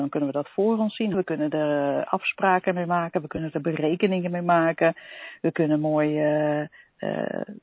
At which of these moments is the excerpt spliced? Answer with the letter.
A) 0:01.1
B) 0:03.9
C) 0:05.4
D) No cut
A